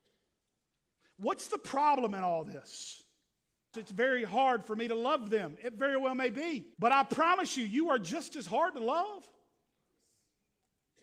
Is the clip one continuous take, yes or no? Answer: no